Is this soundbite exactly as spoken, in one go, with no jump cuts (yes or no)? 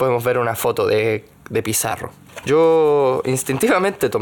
yes